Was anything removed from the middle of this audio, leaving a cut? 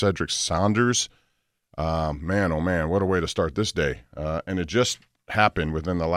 no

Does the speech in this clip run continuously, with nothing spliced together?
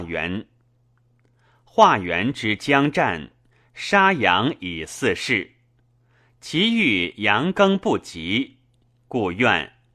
yes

